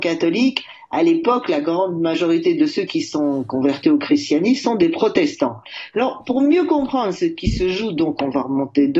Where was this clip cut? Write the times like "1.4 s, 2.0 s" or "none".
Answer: 5.9 s